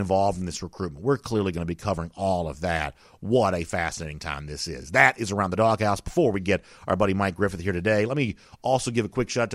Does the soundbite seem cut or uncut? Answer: uncut